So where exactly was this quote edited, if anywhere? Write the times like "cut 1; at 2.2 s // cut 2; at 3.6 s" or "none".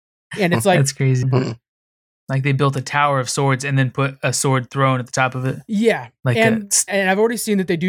cut 1; at 1.2 s // cut 2; at 6.9 s